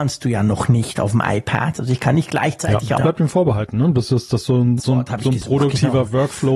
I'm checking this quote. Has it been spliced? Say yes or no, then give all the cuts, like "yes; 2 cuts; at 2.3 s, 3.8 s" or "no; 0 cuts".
yes; 2 cuts; at 3.0 s, 4.8 s